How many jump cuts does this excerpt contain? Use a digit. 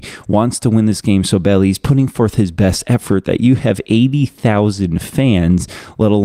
0